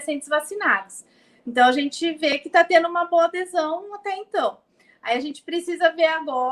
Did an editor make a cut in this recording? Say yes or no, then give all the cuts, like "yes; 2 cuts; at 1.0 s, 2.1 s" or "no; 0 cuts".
no; 0 cuts